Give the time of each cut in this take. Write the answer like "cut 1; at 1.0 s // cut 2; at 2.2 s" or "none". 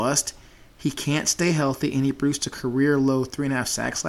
none